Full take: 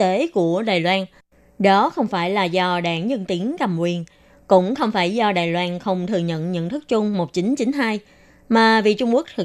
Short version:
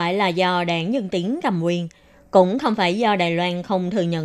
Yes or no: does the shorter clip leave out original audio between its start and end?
no